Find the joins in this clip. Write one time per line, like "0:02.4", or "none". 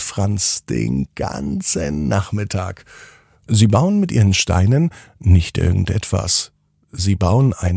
none